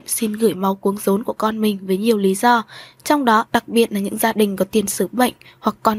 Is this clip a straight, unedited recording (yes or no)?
no